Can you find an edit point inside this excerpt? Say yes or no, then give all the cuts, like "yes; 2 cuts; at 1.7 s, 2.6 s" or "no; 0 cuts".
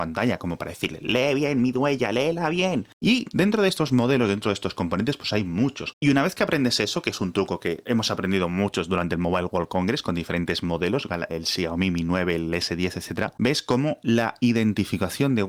yes; 2 cuts; at 2.9 s, 5.9 s